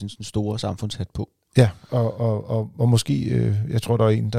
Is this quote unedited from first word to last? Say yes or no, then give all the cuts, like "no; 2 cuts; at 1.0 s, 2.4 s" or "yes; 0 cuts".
yes; 0 cuts